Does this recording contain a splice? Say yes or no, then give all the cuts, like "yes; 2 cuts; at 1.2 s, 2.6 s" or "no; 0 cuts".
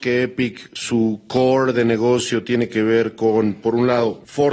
no; 0 cuts